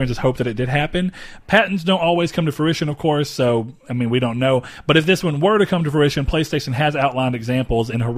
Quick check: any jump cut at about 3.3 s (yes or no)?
no